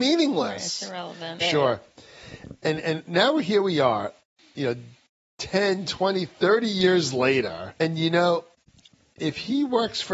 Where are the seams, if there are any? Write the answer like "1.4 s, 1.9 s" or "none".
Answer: 1.4 s, 7.8 s